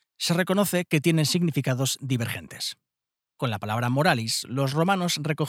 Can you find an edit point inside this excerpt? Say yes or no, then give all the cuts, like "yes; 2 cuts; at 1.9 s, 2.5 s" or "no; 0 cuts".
yes; 1 cut; at 3.2 s